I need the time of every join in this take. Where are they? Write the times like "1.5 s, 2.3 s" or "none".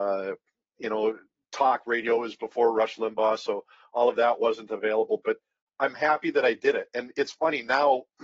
none